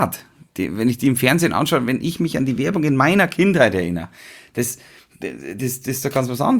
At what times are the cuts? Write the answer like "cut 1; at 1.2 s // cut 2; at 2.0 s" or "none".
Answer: none